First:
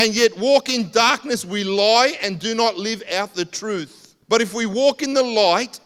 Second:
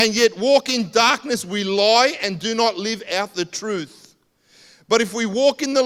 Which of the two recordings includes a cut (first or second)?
first